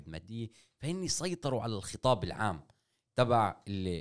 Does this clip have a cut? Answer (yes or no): no